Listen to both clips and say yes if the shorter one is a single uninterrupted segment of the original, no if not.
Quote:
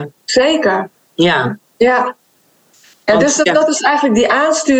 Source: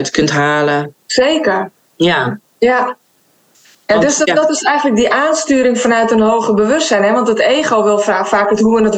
yes